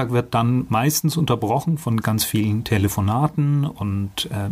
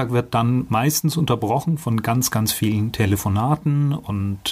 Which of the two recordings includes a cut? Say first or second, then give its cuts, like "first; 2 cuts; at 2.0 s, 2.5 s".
first; 1 cut; at 2.0 s